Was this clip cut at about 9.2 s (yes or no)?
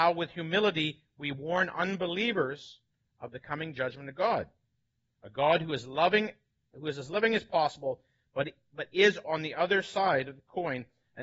yes